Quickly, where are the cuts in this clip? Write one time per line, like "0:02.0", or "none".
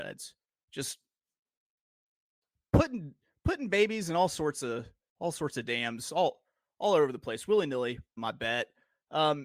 0:08.2